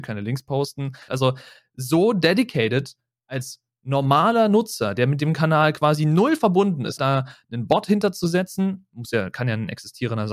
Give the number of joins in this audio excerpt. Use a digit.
2